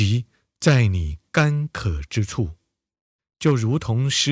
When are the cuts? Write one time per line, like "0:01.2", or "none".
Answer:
0:03.2